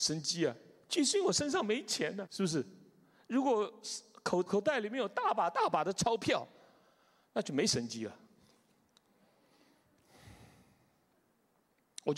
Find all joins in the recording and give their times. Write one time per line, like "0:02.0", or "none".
0:02.3
0:04.5